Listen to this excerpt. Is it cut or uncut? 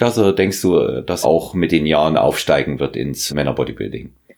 cut